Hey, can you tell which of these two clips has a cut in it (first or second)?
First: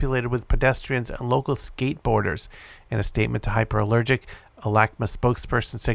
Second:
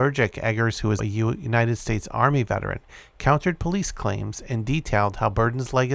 second